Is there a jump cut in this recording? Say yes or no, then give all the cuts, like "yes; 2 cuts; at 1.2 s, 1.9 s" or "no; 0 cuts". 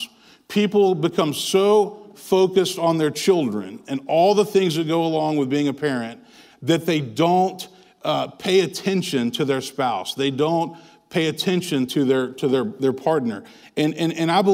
no; 0 cuts